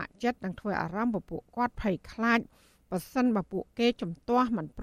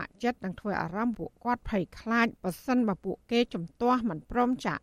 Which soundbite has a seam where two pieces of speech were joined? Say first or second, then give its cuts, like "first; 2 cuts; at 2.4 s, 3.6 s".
second; 2 cuts; at 1.1 s, 2.4 s